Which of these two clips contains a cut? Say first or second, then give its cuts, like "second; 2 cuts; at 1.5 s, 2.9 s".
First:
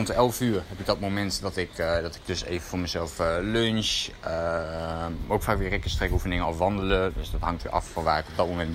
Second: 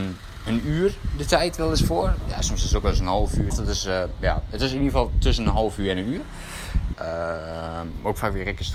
second; 2 cuts; at 3.5 s, 6.9 s